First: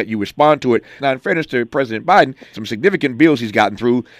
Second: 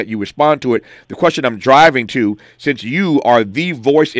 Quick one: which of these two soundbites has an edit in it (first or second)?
first